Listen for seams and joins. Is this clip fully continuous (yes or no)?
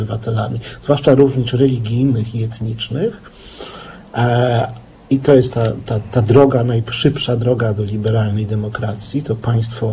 yes